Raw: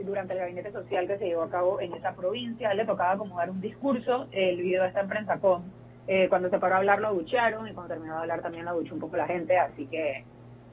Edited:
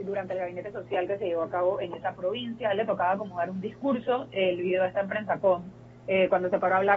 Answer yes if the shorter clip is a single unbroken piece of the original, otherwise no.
yes